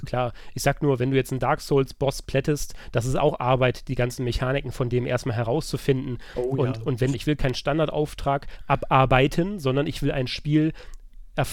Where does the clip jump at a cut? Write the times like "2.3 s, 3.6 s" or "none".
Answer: 7.1 s